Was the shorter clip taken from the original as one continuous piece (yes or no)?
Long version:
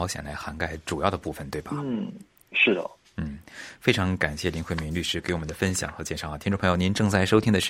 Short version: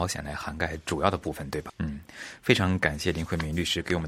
no